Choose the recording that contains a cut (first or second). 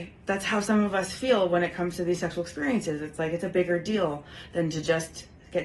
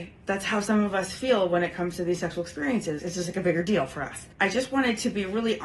second